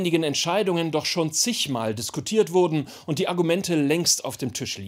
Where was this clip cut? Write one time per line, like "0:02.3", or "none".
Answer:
none

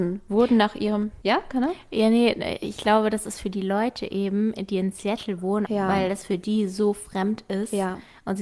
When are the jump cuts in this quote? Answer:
0:05.6

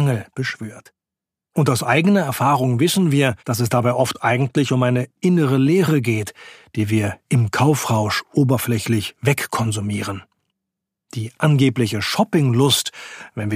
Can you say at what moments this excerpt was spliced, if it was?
0:03.4

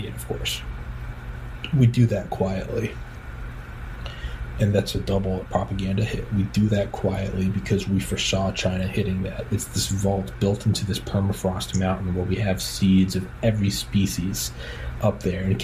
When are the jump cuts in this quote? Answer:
0:09.5

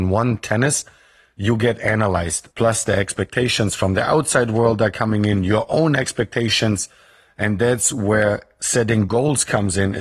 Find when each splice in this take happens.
0:02.5

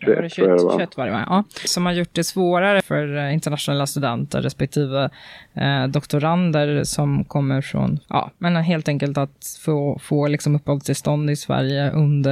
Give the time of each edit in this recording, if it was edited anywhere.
0:08.0

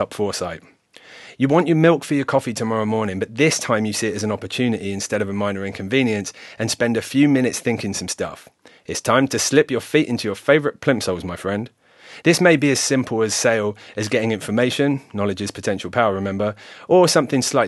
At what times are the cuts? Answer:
0:12.2

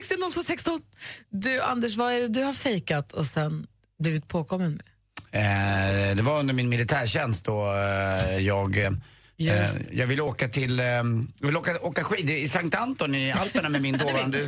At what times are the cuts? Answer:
none

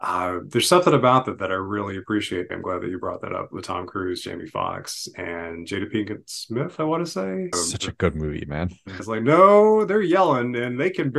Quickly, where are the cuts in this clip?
0:02.5
0:07.5
0:09.0

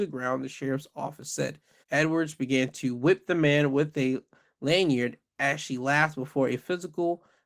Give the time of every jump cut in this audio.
0:01.8

